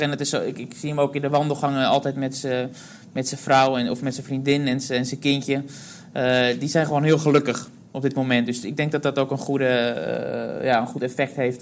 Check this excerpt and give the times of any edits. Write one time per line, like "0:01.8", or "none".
none